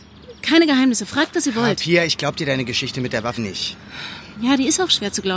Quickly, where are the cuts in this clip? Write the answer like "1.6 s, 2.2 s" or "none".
3.4 s